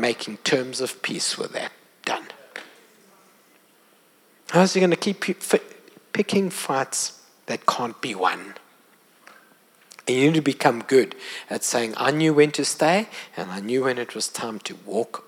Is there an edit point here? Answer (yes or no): no